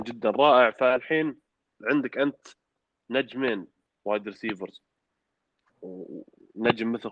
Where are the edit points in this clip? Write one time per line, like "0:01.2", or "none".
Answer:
none

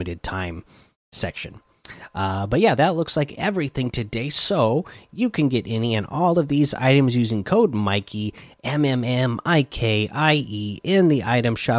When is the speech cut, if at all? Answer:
none

